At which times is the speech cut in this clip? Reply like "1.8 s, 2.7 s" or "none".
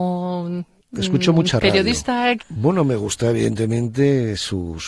2.4 s